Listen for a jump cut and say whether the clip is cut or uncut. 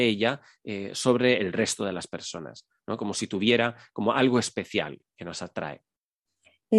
uncut